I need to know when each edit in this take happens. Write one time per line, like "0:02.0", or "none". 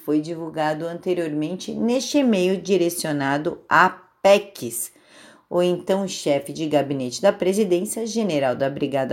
none